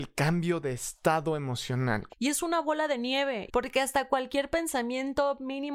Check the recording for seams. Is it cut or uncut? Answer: cut